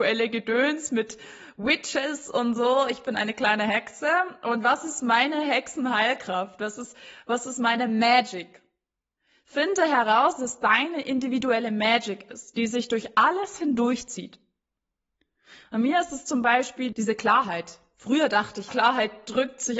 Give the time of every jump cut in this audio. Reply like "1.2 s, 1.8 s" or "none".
16.9 s, 18.7 s